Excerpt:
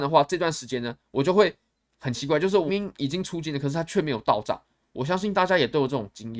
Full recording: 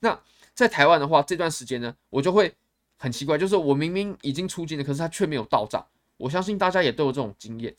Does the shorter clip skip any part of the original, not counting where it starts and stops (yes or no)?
yes